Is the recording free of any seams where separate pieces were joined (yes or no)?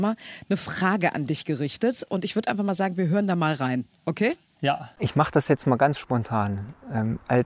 yes